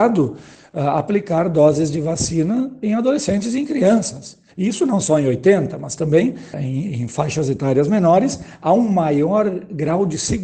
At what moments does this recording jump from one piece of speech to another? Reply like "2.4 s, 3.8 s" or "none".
4.5 s, 6.5 s